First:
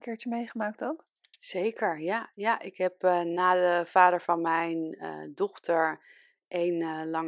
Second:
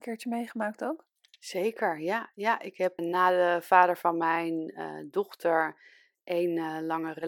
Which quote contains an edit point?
second; 1 cut; at 3.0 s

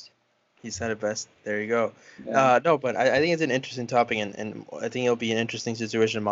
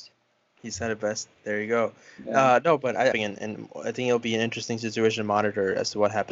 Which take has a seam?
second; 1 cut; at 3.1 s

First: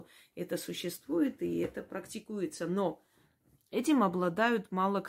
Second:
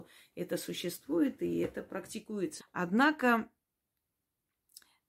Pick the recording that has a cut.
second; 1 cut; at 2.6 s

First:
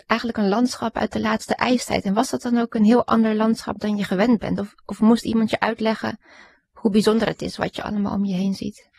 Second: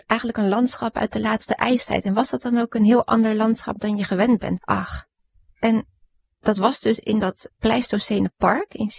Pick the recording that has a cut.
second; 2 cuts; at 4.6 s, 7.5 s

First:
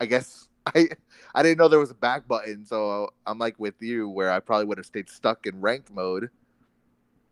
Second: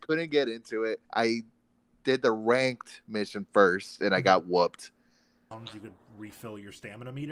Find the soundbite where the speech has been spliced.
second; 2 cuts; at 1.1 s, 5.5 s

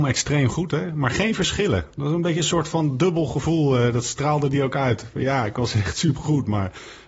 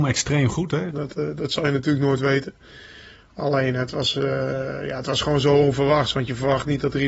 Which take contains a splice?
second; 1 cut; at 0.9 s

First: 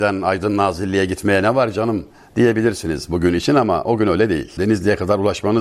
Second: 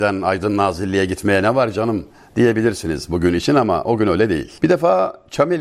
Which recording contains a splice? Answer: first; 1 cut; at 4.6 s

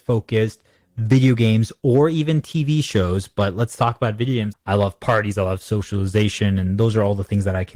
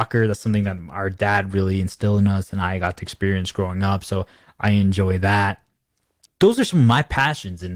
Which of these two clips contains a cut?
first; 1 cut; at 4.5 s

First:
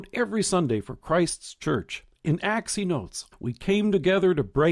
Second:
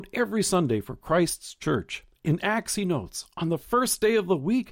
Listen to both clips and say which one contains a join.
first; 1 cut; at 3.3 s

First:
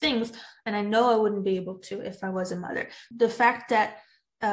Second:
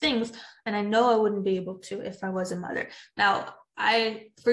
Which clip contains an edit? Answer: first; 1 cut; at 3.1 s

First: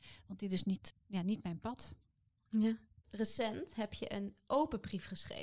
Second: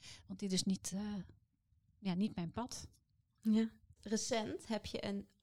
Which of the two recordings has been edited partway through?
first; 1 cut; at 0.9 s

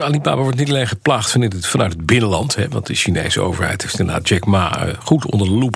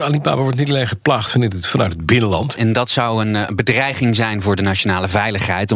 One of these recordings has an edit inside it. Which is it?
second; 1 cut; at 2.6 s

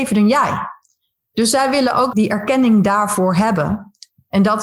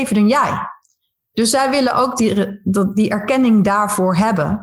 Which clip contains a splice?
first; 1 cut; at 2.1 s

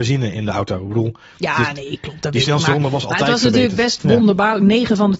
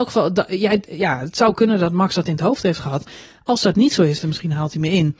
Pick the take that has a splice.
second; 1 cut; at 4.2 s

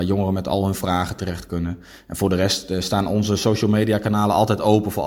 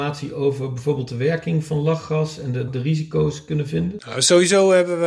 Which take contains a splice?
second; 1 cut; at 2.7 s

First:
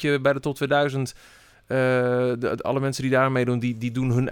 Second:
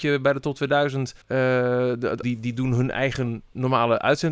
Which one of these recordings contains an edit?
second; 2 cuts; at 1.2 s, 2.2 s

